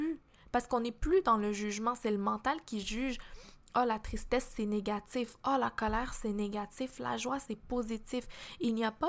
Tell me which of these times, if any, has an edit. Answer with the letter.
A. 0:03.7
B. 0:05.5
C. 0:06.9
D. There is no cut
D